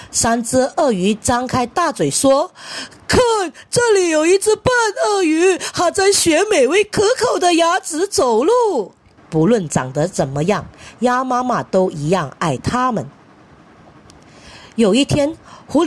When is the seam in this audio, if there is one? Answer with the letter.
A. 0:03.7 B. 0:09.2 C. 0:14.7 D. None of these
B